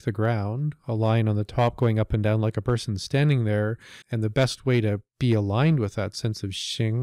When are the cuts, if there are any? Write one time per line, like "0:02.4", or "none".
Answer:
0:04.0
0:05.1